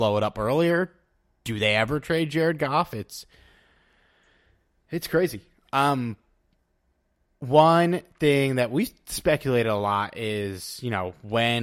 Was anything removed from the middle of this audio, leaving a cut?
no; 0 cuts

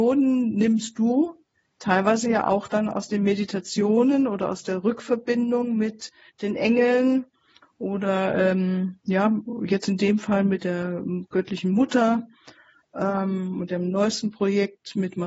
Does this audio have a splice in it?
no; 0 cuts

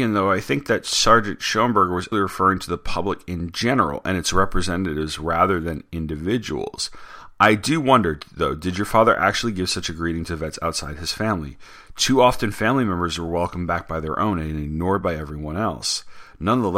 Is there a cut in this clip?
yes; 1 cut; at 2.1 s

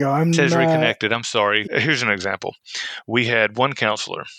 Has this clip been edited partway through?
yes; 1 cut; at 1.6 s

